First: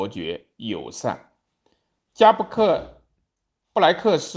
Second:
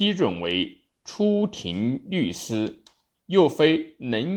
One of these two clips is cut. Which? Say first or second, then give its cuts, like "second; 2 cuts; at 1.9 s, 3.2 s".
second; 1 cut; at 3.1 s